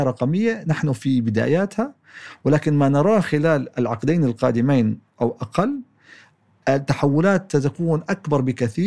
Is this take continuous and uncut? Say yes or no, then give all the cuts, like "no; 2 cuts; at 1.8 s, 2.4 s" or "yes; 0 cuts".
yes; 0 cuts